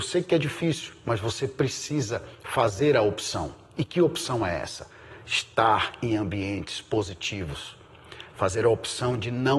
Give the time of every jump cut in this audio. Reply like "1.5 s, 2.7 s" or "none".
none